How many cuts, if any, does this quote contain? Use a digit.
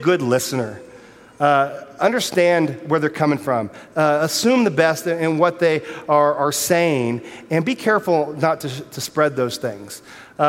0